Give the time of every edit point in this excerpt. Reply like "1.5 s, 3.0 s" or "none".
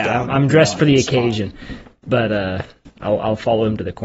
none